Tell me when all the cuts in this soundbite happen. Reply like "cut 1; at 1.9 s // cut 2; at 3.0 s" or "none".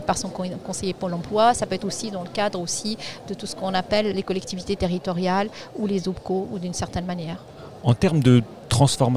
cut 1; at 4.1 s

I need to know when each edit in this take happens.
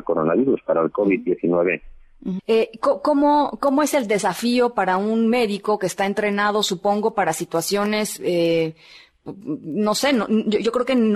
cut 1; at 2.4 s

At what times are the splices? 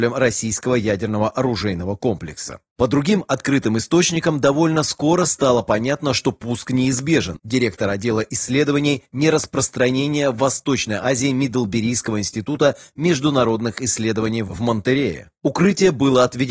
cut 1; at 7.4 s // cut 2; at 15.4 s

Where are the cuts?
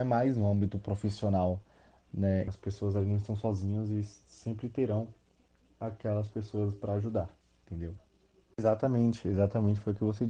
cut 1; at 2.5 s

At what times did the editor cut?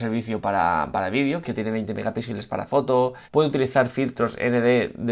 cut 1; at 1.4 s // cut 2; at 3.2 s

